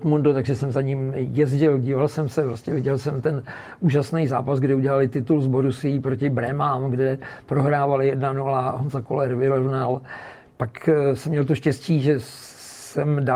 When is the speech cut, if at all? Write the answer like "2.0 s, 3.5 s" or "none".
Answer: none